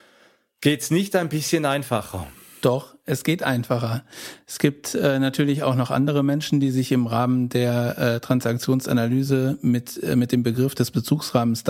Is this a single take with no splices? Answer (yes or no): yes